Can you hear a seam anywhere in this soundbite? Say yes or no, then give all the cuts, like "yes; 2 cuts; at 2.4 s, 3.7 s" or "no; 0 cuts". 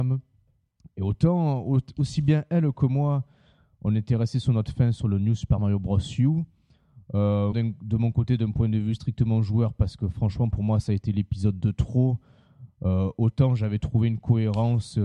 yes; 1 cut; at 7.5 s